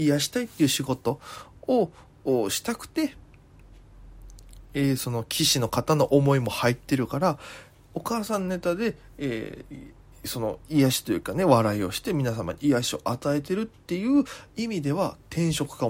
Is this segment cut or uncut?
uncut